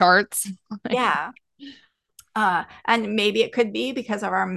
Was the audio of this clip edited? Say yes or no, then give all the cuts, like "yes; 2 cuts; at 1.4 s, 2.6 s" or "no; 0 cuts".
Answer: no; 0 cuts